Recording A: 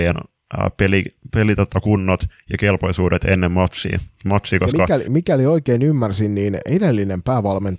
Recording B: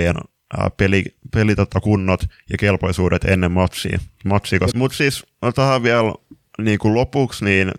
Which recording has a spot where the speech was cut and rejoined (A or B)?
B